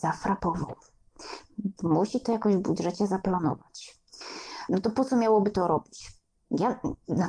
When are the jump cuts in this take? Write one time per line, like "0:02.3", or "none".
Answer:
0:01.8